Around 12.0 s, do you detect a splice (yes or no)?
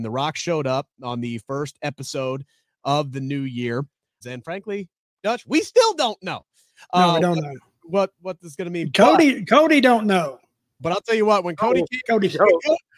no